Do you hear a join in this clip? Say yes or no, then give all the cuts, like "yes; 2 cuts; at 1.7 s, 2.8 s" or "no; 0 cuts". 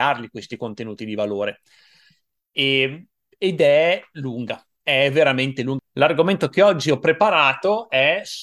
yes; 1 cut; at 5.8 s